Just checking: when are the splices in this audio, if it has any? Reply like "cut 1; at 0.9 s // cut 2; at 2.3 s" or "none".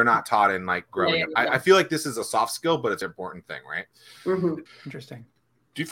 cut 1; at 1.4 s // cut 2; at 3.0 s // cut 3; at 4.7 s